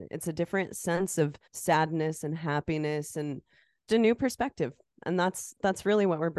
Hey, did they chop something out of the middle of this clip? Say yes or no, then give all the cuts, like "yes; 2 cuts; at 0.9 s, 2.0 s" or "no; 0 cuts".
yes; 2 cuts; at 1.5 s, 3.9 s